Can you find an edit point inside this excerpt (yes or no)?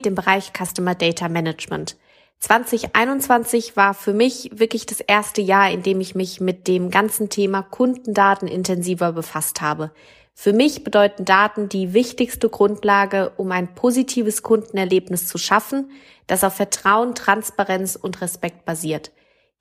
no